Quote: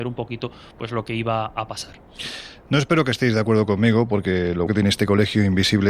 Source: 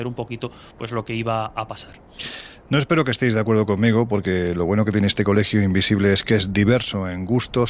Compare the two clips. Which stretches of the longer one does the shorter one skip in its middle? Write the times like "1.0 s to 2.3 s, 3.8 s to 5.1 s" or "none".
4.7 s to 4.8 s